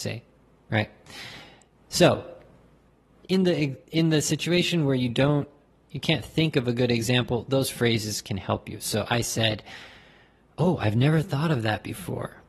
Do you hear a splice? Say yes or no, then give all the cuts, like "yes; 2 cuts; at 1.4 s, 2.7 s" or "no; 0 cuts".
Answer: no; 0 cuts